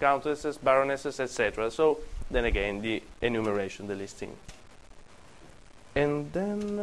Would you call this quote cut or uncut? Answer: uncut